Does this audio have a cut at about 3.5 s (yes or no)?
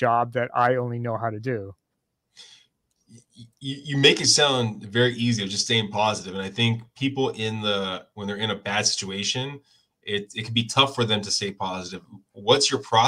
no